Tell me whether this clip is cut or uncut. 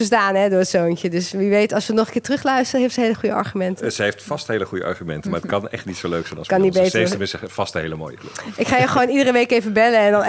uncut